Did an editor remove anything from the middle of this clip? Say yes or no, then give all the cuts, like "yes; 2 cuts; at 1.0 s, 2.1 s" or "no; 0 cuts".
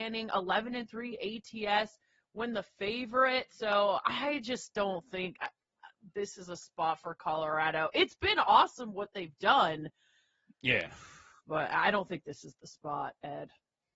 no; 0 cuts